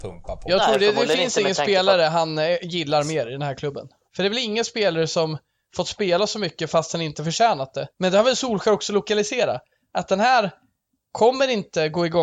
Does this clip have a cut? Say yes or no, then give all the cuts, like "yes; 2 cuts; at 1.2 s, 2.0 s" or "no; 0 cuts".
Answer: yes; 2 cuts; at 4.1 s, 7.9 s